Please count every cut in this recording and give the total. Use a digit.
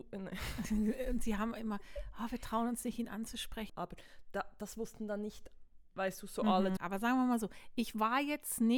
2